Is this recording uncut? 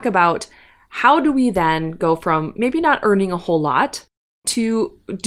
yes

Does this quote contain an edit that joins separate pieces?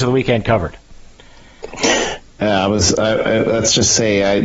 no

